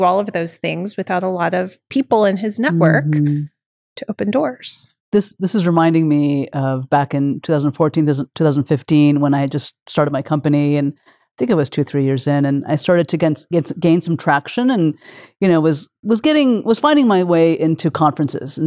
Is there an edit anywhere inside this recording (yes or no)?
no